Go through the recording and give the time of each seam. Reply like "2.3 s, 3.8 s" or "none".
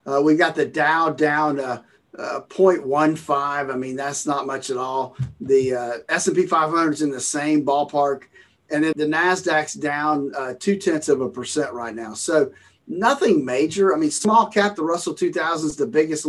8.9 s

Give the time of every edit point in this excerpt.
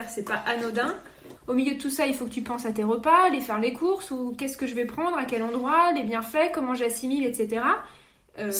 1.4 s

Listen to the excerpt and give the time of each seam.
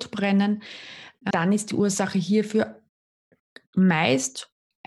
1.3 s

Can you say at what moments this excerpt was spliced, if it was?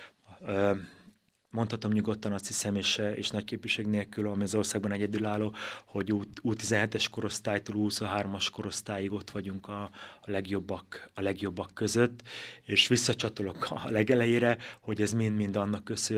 none

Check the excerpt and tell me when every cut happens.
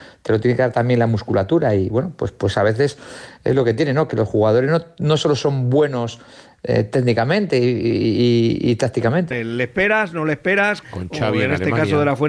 9.3 s, 10.8 s

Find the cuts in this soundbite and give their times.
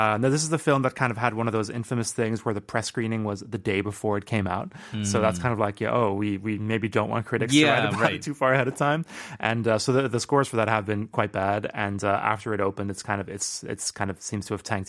none

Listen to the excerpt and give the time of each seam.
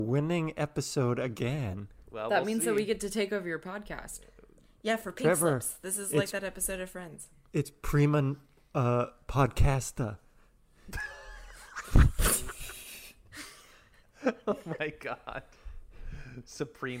none

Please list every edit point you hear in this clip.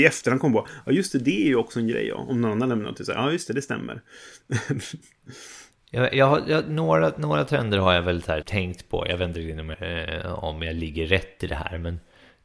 8.4 s, 9.7 s

